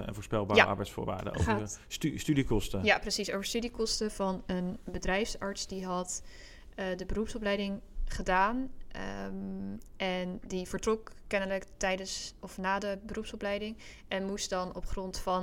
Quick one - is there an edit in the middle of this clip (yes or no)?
no